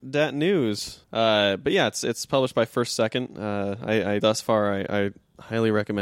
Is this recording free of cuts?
no; 2 cuts; at 1.0 s, 4.2 s

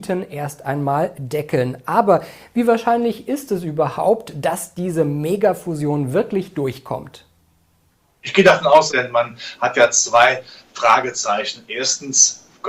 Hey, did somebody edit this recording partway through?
yes; 1 cut; at 8.9 s

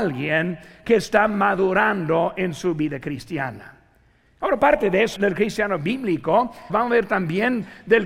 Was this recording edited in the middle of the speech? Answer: yes; 2 cuts; at 5.2 s, 6.7 s

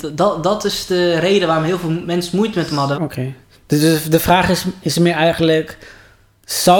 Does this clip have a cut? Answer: yes; 1 cut; at 2.9 s

